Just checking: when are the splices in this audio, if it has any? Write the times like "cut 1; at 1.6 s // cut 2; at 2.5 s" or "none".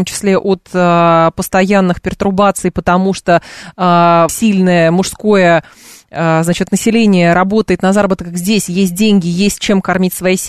cut 1; at 4.3 s